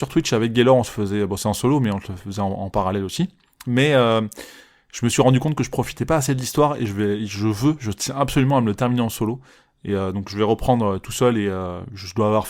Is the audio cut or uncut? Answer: uncut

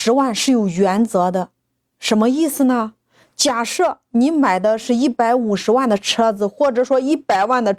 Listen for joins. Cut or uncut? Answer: uncut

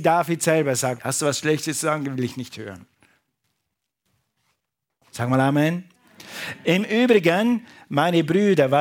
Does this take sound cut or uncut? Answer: cut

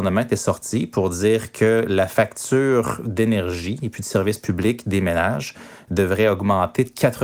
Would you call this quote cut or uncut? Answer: uncut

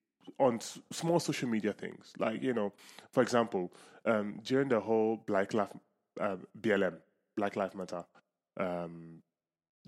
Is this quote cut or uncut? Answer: uncut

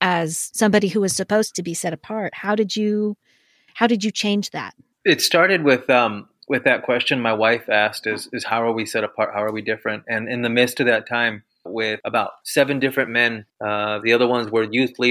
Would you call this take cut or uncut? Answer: cut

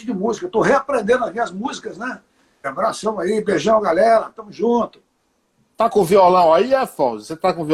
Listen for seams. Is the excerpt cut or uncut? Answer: cut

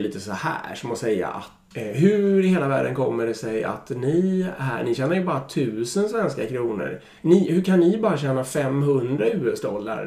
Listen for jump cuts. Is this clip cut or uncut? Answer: cut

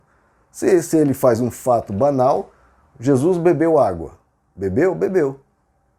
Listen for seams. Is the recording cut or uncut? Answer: cut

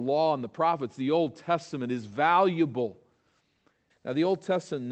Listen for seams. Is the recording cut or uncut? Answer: cut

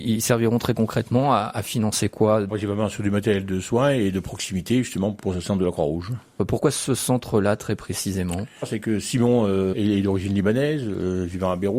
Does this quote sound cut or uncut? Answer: uncut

